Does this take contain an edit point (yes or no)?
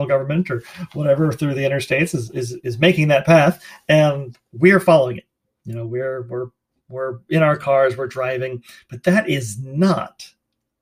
no